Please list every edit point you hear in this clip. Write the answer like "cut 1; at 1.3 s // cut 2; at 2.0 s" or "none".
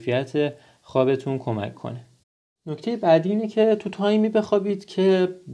none